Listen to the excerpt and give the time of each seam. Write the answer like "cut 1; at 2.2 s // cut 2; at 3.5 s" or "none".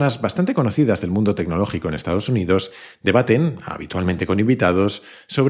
none

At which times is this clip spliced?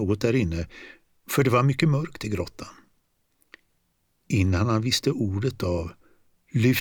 none

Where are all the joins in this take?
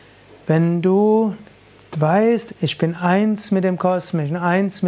cut 1; at 2.5 s

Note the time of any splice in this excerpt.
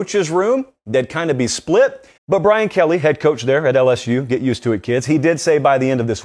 cut 1; at 2.2 s

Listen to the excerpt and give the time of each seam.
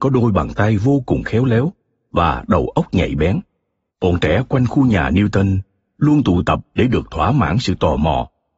cut 1; at 3.9 s

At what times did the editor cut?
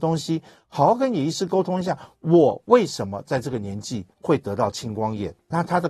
none

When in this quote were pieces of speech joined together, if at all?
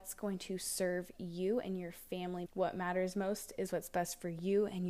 cut 1; at 2.5 s

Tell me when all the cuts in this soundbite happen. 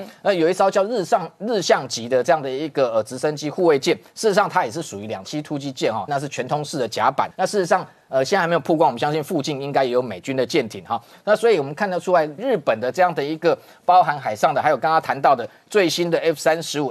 cut 1; at 6.1 s // cut 2; at 7.3 s // cut 3; at 12.4 s

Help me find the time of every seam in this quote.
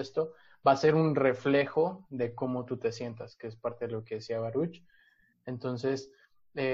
none

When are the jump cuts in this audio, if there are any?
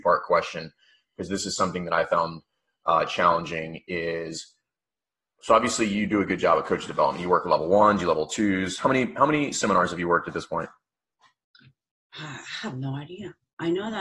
none

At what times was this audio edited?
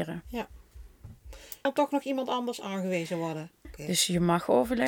cut 1; at 1.7 s // cut 2; at 3.6 s

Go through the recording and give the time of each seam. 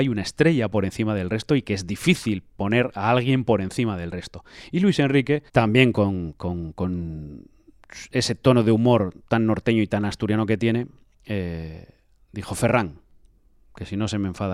cut 1; at 5.5 s

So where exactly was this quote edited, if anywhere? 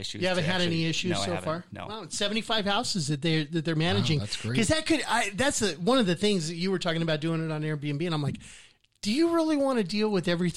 none

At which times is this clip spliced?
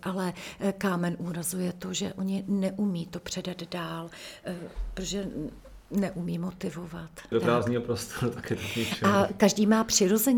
cut 1; at 7.3 s

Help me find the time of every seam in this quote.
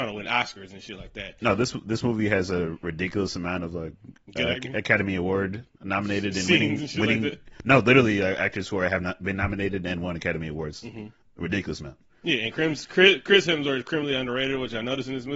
none

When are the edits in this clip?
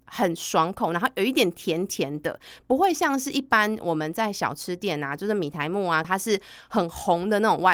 cut 1; at 6.0 s

